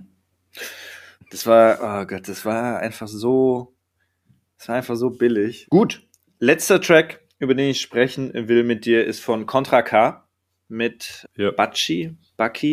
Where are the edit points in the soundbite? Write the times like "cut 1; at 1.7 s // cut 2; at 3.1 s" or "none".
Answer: cut 1; at 1.2 s // cut 2; at 5.6 s // cut 3; at 11.2 s